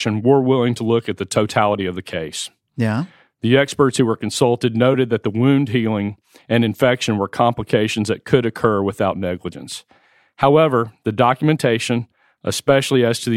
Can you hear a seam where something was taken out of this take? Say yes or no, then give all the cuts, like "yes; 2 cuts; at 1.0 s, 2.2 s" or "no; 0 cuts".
no; 0 cuts